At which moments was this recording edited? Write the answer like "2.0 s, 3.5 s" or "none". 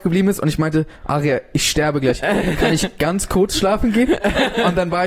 none